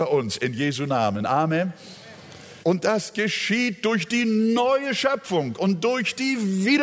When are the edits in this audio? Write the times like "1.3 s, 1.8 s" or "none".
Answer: 2.6 s